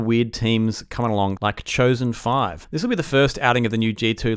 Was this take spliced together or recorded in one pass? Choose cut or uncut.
cut